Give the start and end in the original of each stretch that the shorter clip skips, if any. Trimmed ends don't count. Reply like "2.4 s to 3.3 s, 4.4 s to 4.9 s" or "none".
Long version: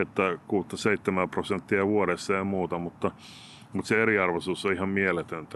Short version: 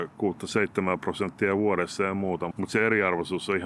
2.8 s to 3.7 s